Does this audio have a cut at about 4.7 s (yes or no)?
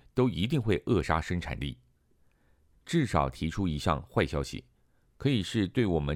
no